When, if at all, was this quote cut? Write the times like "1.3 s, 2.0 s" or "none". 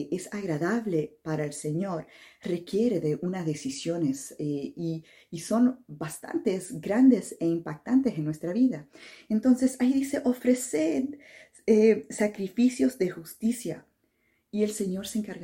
none